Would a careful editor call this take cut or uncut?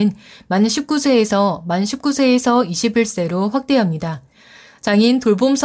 uncut